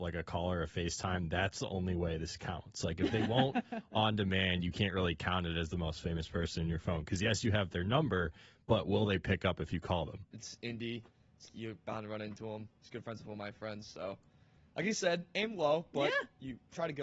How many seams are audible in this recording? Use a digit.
2